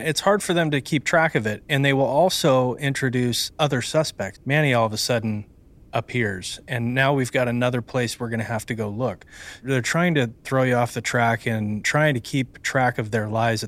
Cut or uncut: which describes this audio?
cut